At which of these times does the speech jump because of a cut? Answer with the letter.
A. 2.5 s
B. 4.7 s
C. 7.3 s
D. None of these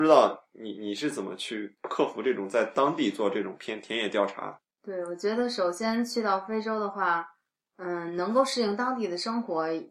D